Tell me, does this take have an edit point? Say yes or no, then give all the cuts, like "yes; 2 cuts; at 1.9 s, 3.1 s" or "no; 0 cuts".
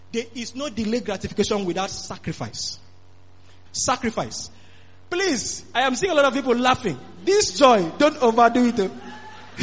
yes; 1 cut; at 3.7 s